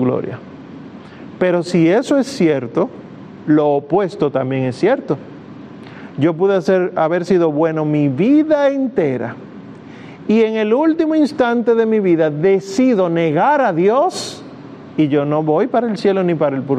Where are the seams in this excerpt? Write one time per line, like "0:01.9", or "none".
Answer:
none